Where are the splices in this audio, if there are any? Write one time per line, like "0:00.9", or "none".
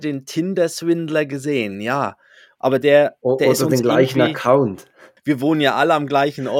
0:02.6
0:05.2